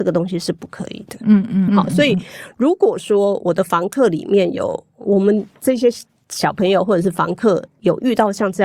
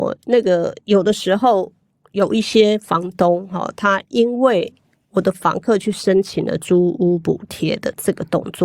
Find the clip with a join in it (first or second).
first